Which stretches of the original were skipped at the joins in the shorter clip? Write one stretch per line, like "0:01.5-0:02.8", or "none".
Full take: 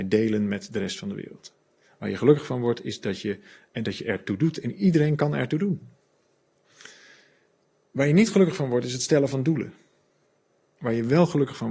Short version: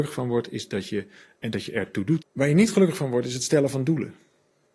0:04.5-0:07.8